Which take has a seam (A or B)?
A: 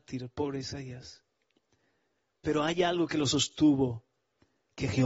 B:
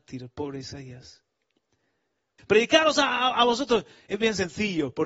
B